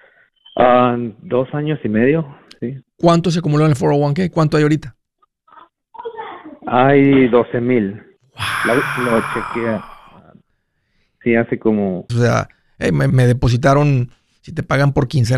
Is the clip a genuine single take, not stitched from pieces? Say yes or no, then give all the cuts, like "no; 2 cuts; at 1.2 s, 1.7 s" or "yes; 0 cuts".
no; 2 cuts; at 12.1 s, 13.1 s